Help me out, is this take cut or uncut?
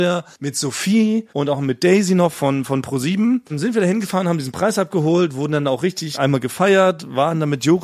uncut